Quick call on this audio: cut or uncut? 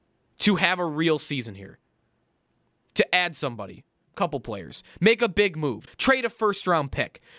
cut